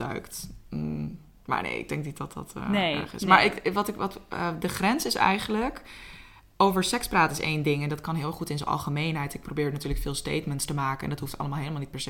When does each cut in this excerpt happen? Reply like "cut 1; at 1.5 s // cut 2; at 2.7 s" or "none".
none